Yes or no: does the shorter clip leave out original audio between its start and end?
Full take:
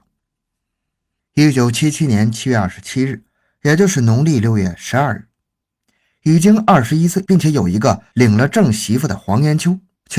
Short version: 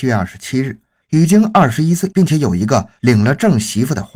yes